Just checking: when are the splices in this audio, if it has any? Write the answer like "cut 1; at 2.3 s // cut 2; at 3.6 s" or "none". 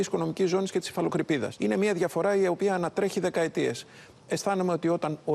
none